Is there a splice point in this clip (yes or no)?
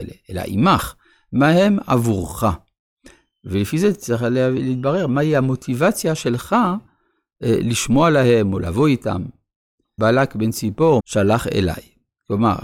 yes